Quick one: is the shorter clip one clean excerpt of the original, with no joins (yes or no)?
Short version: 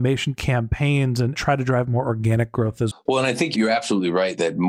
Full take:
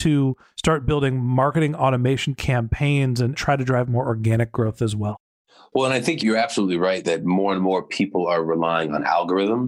no